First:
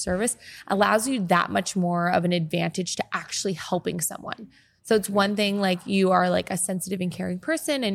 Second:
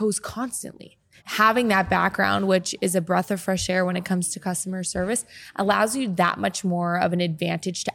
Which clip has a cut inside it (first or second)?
second